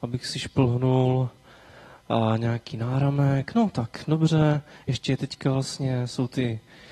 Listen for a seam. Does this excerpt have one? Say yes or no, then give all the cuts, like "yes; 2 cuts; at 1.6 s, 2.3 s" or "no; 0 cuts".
no; 0 cuts